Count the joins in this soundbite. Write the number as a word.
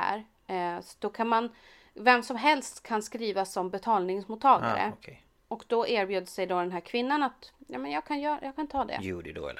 zero